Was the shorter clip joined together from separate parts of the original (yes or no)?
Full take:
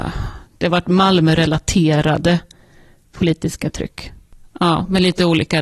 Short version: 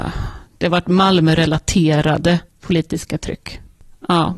yes